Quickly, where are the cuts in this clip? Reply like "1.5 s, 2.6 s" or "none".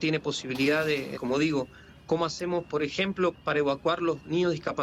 1.2 s, 3.3 s